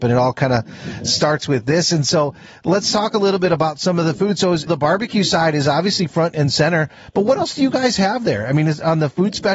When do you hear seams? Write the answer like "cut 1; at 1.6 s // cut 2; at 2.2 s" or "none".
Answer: cut 1; at 4.7 s